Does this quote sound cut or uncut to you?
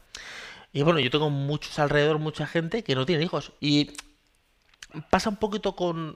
cut